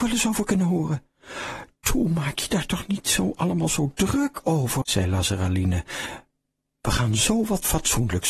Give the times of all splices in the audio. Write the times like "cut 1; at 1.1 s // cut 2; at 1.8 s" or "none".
cut 1; at 4.8 s